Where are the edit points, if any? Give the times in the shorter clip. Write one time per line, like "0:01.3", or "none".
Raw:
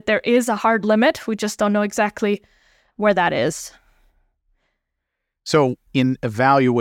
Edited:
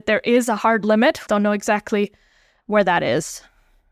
0:01.3